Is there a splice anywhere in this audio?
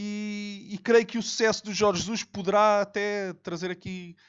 no; 0 cuts

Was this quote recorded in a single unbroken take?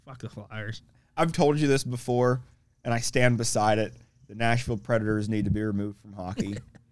yes; 0 cuts

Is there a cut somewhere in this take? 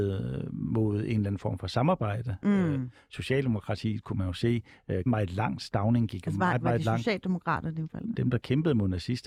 yes; 2 cuts; at 5.1 s, 8.1 s

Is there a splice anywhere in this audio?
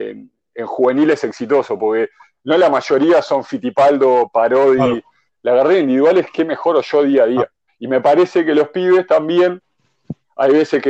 yes; 2 cuts; at 5.3 s, 7.7 s

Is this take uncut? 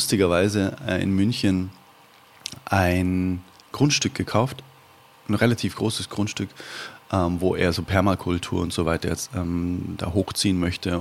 yes; 0 cuts

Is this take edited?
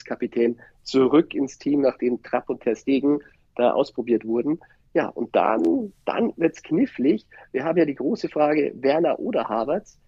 no; 0 cuts

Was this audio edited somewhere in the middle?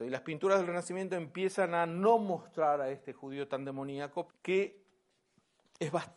yes; 1 cut; at 4.3 s

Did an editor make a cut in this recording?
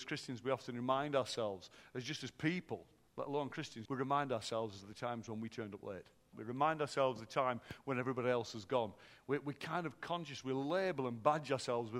yes; 2 cuts; at 3.9 s, 6.3 s

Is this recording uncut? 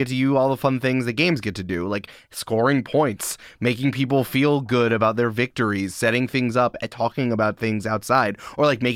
yes; 0 cuts

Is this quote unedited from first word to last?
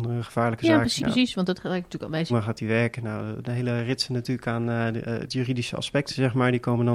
no; 2 cuts; at 1.0 s, 2.3 s

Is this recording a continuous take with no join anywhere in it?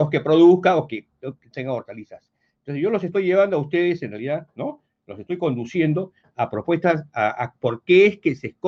yes; 0 cuts

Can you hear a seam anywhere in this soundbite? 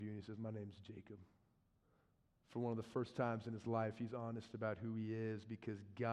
no; 0 cuts

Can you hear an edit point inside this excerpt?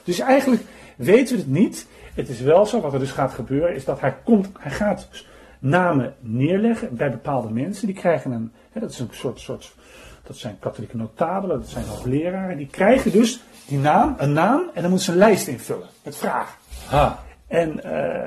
yes; 1 cut; at 4.5 s

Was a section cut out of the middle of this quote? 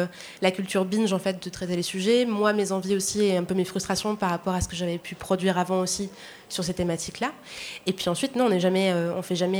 no; 0 cuts

